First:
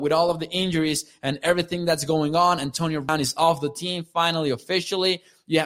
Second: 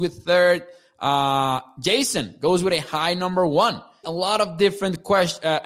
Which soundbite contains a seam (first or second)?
second